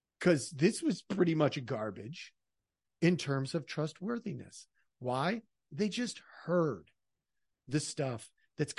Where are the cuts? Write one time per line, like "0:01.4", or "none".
none